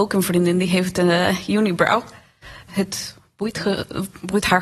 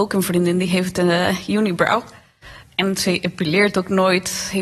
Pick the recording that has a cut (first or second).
first